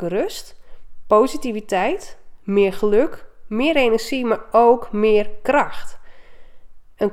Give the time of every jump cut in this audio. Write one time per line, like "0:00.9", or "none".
none